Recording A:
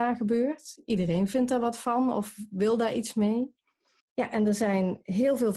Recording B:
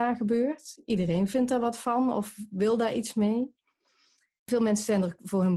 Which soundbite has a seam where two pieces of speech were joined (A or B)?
A